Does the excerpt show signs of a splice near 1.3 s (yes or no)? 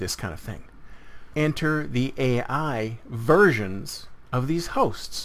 yes